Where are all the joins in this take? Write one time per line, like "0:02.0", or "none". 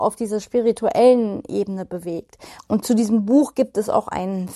0:02.6